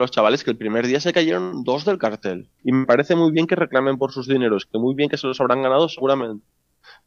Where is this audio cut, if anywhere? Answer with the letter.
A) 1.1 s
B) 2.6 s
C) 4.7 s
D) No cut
B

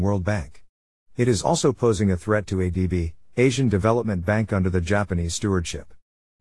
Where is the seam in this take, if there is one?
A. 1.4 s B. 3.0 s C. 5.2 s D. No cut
D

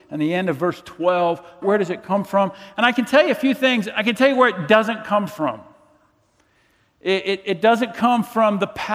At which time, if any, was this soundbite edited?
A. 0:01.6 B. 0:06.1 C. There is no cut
A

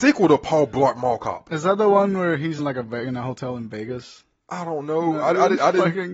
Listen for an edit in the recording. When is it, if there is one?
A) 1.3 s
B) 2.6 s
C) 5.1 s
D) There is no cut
B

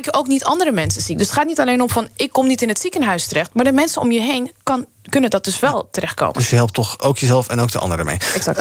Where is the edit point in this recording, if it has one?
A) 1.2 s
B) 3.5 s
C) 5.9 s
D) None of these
D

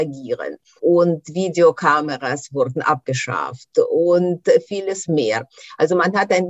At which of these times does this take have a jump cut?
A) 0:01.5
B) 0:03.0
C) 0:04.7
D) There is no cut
C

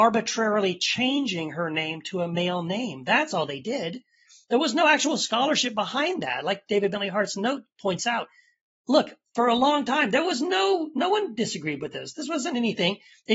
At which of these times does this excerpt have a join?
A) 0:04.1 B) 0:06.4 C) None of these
C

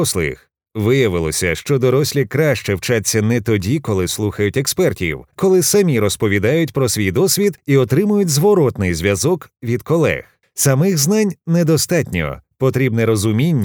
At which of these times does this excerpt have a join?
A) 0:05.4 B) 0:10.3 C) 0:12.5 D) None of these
A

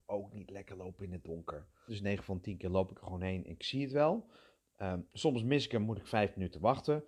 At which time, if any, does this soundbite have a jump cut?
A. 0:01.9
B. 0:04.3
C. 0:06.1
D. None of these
A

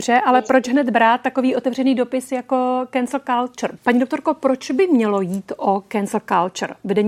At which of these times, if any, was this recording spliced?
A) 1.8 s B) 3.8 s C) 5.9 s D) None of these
B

